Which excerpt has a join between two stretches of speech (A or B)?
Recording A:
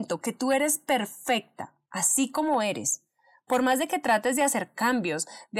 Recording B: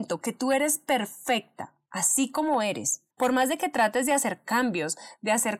B